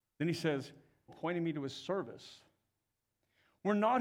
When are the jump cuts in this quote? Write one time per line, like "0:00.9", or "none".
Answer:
0:01.1